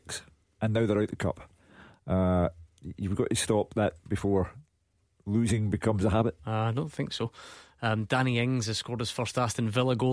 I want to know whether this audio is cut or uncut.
cut